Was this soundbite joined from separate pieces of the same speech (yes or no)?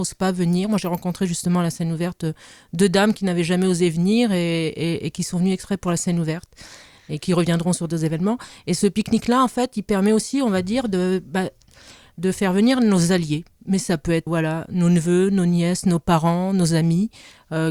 yes